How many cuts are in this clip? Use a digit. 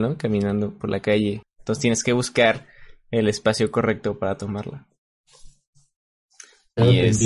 1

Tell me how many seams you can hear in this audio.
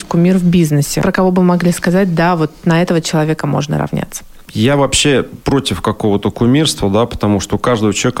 0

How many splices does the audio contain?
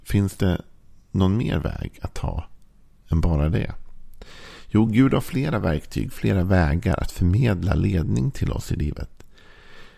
0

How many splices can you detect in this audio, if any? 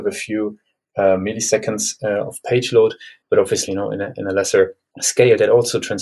1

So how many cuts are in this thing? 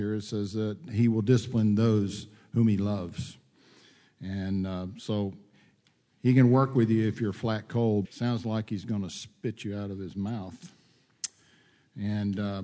1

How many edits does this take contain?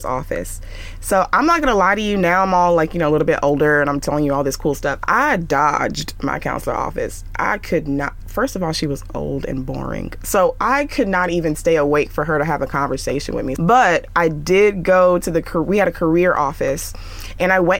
1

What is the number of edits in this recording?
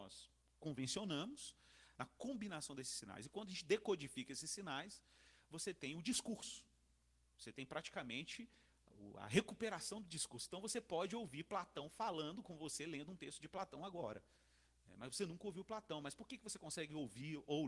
1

